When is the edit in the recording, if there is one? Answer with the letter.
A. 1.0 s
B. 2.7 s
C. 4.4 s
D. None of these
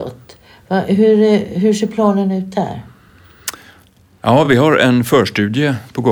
D